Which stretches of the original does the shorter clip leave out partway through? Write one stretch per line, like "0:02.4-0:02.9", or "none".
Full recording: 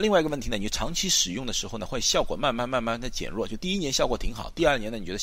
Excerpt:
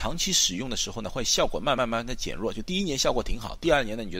0:02.5-0:02.7